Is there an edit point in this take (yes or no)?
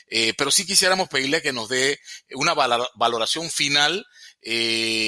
no